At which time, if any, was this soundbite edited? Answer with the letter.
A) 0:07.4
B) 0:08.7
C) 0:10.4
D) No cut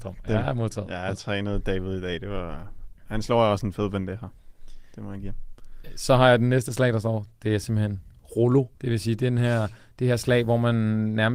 B